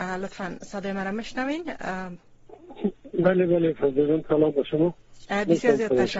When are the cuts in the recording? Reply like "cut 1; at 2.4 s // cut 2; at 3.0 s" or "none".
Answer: none